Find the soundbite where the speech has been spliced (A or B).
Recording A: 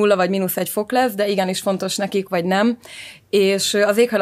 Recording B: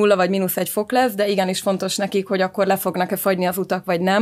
A